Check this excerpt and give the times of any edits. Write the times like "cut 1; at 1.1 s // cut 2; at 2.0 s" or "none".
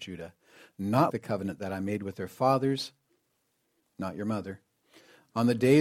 cut 1; at 1.1 s